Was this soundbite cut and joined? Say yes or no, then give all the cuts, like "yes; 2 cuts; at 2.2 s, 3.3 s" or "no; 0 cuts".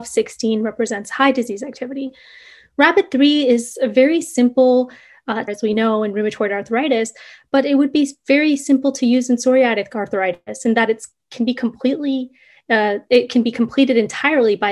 yes; 1 cut; at 5.5 s